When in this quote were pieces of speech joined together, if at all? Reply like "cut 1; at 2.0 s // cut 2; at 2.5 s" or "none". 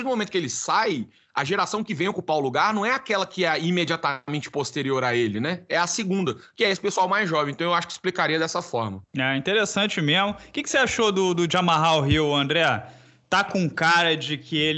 none